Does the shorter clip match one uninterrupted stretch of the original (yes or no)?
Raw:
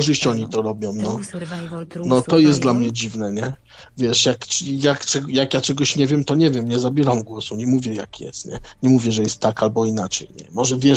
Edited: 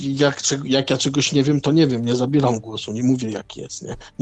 yes